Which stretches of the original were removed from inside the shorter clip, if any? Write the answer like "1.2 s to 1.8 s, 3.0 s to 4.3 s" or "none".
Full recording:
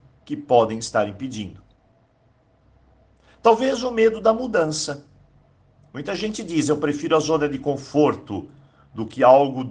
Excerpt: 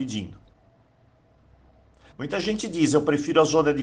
3.3 s to 5.9 s